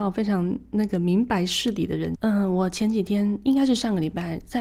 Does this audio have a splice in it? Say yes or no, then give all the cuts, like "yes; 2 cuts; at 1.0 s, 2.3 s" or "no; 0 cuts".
yes; 1 cut; at 2.1 s